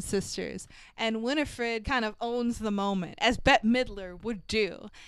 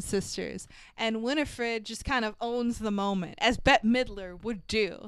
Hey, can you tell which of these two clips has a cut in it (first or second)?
first